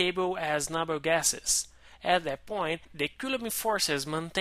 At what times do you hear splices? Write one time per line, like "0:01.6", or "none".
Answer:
none